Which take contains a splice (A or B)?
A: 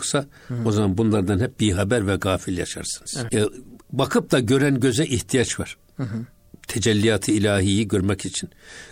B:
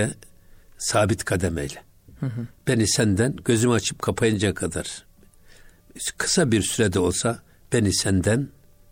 A